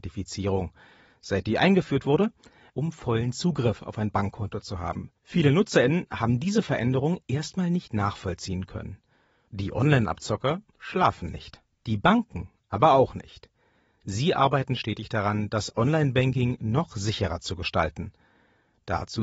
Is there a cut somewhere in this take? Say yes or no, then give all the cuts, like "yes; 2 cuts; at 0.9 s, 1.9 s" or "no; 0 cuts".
yes; 3 cuts; at 2.7 s, 5.2 s, 9.5 s